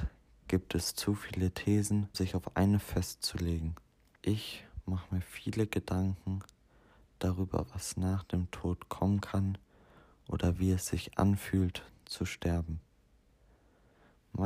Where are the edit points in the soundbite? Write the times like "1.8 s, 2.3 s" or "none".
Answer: 2.1 s, 4.2 s